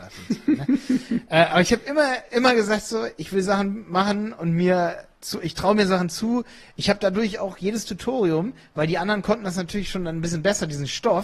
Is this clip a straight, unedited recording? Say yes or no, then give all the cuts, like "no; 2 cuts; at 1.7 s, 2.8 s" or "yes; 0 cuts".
yes; 0 cuts